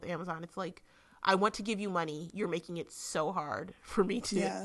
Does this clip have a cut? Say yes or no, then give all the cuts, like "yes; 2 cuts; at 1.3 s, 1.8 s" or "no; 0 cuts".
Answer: no; 0 cuts